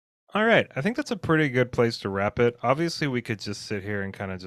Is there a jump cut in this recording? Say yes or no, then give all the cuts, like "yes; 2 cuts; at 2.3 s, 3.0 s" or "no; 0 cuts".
no; 0 cuts